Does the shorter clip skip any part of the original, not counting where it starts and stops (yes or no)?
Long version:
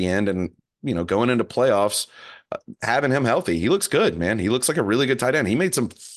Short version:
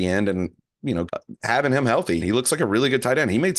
yes